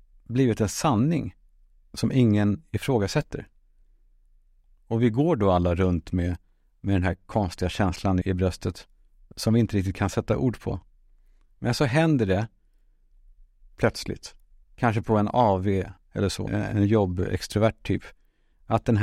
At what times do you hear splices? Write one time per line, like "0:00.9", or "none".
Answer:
0:08.2
0:16.5